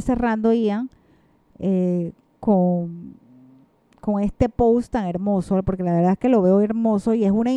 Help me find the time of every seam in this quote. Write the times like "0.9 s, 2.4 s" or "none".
none